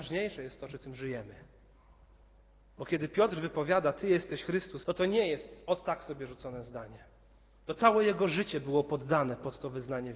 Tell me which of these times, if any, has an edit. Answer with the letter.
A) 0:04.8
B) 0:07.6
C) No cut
A